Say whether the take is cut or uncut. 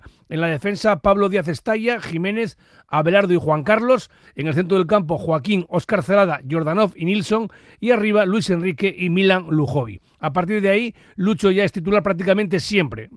uncut